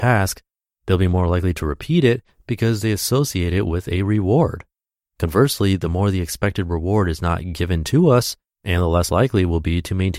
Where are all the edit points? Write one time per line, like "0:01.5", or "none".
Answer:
0:05.1
0:08.5